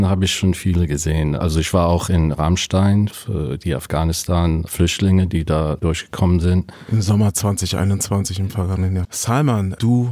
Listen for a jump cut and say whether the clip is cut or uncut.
cut